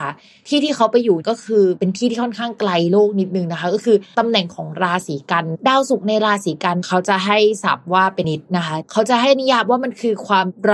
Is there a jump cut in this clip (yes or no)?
yes